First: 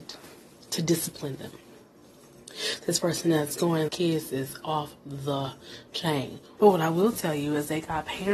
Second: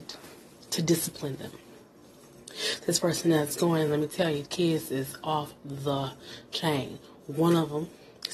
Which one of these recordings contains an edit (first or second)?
first